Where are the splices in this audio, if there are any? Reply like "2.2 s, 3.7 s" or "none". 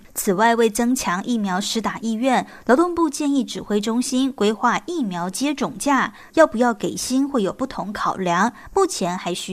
6.3 s